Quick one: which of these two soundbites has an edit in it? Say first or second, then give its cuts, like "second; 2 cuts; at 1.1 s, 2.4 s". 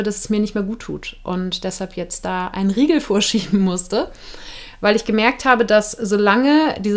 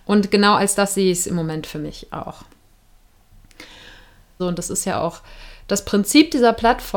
second; 1 cut; at 4.4 s